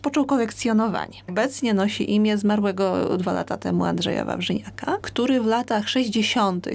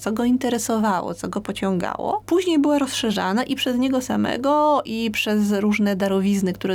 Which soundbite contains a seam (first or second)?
first